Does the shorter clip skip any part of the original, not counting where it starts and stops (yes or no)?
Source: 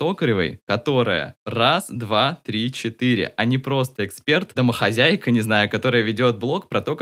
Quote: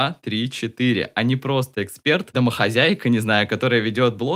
no